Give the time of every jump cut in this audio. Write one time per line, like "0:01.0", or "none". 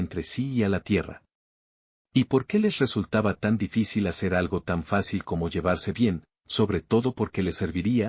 none

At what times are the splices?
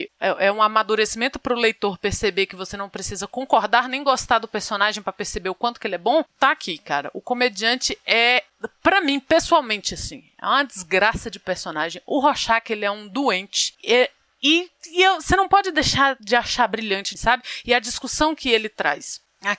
0:17.2

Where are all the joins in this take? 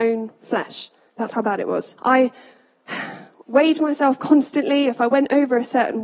0:02.0

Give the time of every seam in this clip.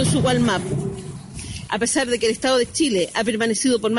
0:01.7

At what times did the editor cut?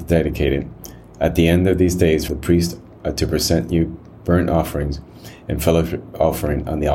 0:02.3

